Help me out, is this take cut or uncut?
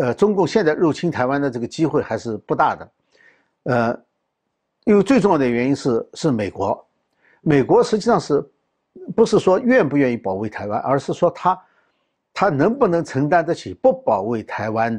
uncut